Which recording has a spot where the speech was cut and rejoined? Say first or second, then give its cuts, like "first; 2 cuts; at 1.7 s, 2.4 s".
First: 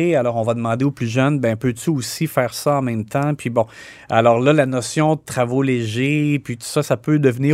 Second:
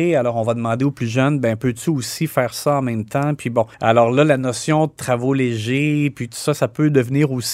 second; 1 cut; at 3.7 s